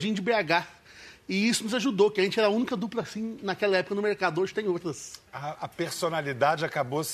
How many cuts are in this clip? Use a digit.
0